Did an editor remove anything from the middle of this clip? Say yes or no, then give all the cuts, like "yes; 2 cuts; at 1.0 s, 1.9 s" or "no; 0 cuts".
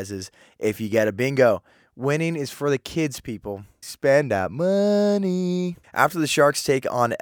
yes; 2 cuts; at 3.8 s, 5.8 s